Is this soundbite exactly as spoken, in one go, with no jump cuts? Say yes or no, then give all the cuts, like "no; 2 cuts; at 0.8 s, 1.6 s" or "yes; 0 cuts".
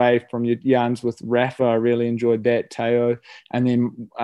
yes; 0 cuts